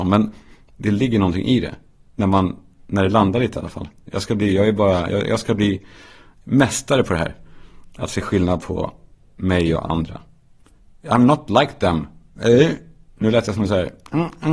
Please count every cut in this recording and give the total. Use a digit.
0